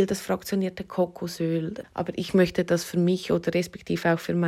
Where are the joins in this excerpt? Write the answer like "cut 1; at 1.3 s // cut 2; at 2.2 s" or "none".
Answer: cut 1; at 1.8 s